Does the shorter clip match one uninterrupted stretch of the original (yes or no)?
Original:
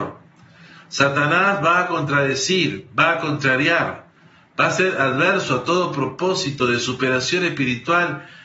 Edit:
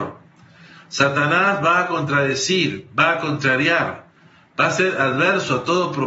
yes